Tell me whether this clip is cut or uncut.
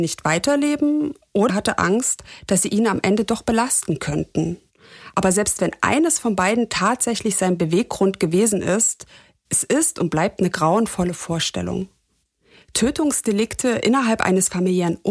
cut